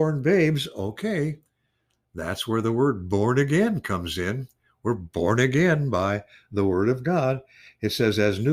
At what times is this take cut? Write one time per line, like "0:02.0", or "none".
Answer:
none